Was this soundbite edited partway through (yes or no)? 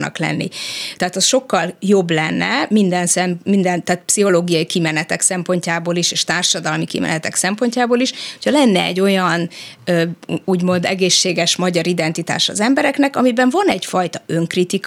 yes